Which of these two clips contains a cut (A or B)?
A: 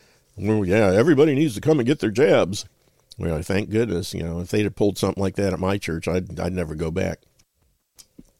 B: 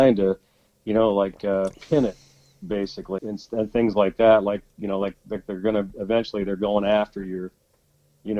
B